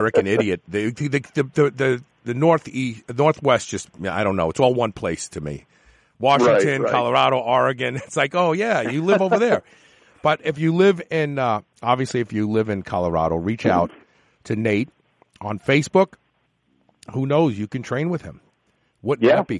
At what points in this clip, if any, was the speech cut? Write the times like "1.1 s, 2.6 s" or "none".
none